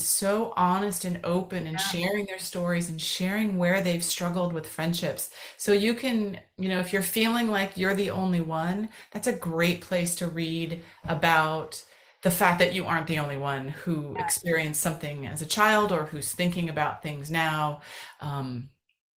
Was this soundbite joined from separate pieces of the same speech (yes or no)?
no